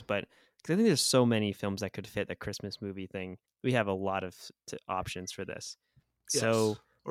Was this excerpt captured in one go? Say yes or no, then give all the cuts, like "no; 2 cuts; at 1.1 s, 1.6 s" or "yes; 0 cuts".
no; 1 cut; at 3.4 s